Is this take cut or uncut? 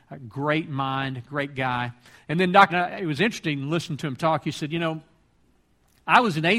cut